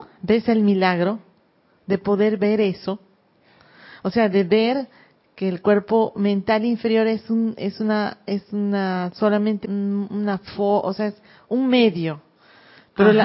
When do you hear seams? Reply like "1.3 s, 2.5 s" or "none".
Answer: 9.6 s